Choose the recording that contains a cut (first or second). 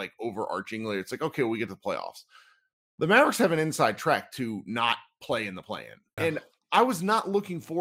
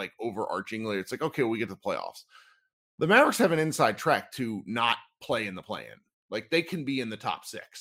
first